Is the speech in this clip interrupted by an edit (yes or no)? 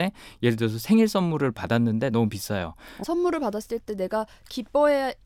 yes